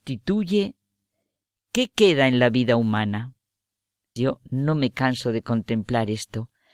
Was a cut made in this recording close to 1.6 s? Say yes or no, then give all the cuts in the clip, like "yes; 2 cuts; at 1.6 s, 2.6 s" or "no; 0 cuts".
no; 1 cut; at 4.2 s